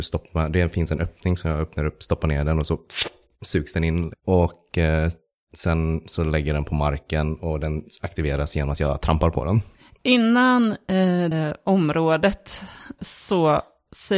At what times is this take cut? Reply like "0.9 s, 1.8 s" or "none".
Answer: 11.3 s, 13.0 s